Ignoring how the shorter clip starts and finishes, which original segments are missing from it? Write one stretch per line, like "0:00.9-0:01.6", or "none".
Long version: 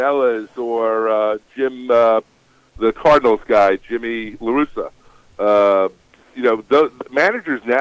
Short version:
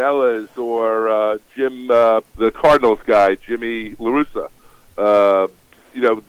0:02.3-0:02.7